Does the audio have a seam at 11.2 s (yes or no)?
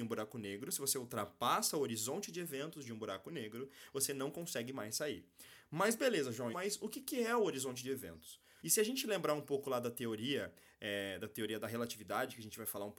no